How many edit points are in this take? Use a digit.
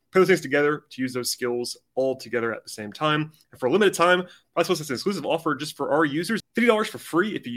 1